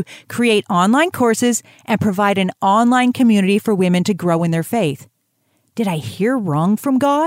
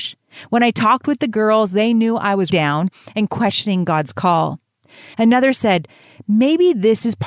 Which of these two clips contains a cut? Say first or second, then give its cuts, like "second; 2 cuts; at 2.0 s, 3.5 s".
second; 2 cuts; at 2.5 s, 5.1 s